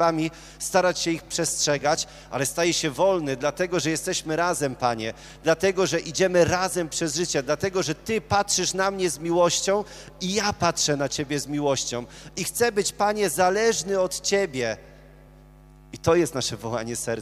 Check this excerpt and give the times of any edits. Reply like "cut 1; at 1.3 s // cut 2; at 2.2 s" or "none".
none